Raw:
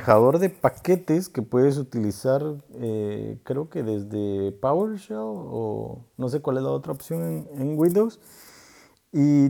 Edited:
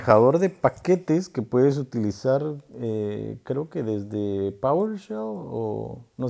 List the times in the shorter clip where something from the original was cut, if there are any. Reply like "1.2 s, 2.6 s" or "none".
none